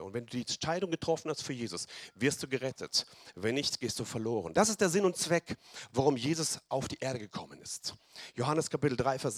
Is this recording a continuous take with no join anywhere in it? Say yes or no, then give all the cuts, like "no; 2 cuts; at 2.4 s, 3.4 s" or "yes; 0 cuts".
no; 1 cut; at 4.5 s